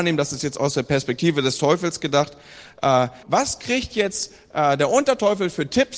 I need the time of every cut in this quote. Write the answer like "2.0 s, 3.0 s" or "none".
3.2 s